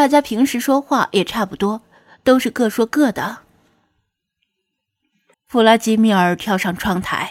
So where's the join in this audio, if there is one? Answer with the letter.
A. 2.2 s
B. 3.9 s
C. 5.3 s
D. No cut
C